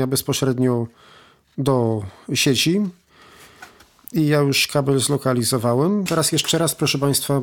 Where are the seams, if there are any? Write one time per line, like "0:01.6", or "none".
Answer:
0:06.1